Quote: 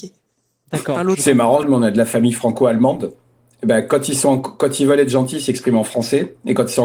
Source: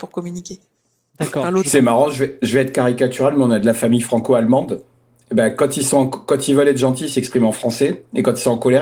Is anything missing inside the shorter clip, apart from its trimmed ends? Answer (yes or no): yes